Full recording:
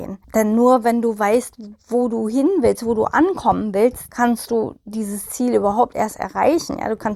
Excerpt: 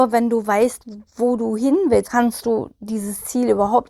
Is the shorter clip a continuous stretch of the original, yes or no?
no